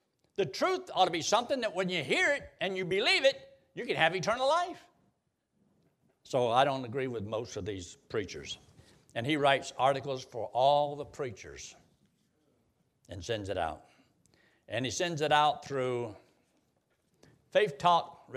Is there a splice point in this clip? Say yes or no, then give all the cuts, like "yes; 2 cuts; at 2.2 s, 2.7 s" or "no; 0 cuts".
no; 0 cuts